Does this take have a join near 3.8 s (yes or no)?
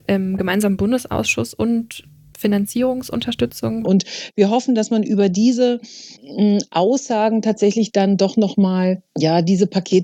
yes